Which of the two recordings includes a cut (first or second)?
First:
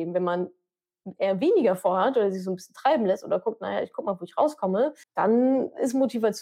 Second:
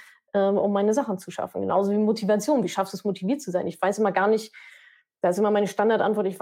first